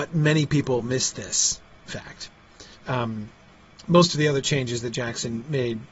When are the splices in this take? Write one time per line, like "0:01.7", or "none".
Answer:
0:02.8